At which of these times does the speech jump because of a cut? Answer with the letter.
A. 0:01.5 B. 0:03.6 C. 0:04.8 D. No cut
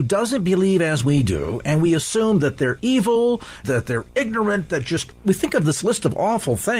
B